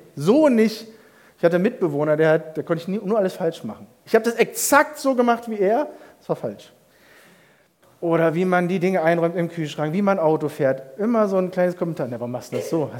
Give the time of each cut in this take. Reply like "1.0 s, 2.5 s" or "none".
none